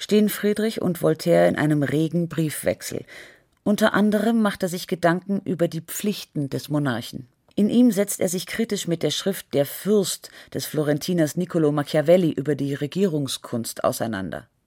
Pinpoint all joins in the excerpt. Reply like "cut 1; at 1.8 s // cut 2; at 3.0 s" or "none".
cut 1; at 3.5 s // cut 2; at 7.5 s